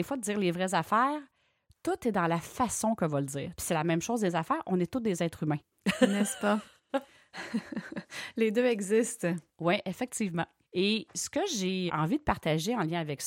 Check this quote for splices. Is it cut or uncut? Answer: cut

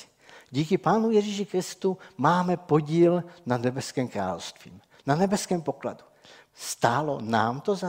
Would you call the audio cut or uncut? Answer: cut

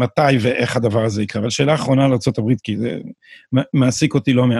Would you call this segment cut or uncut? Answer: uncut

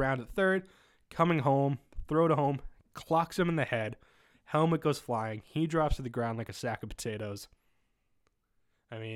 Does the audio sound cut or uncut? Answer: uncut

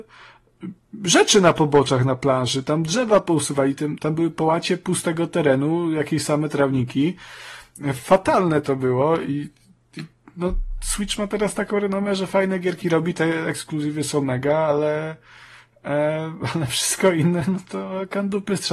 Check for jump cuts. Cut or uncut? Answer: uncut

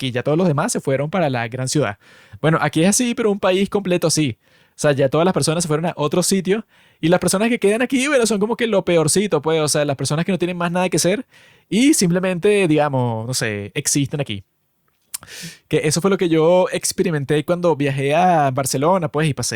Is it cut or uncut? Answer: uncut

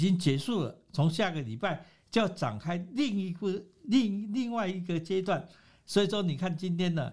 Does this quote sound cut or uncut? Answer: cut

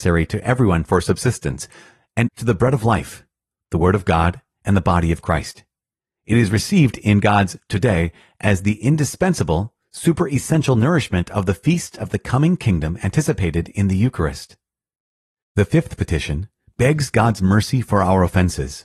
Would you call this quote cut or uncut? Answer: cut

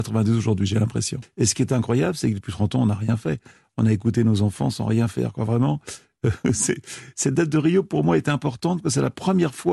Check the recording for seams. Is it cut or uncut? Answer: uncut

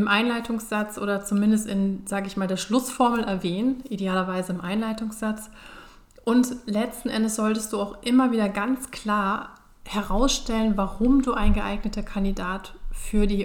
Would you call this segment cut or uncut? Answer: uncut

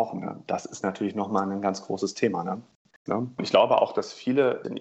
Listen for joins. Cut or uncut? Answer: cut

